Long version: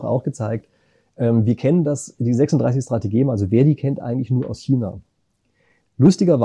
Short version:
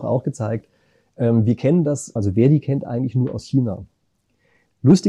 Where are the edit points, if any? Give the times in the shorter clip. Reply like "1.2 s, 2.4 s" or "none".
2.2 s